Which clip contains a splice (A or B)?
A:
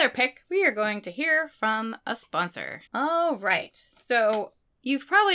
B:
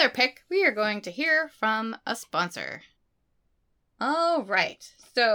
A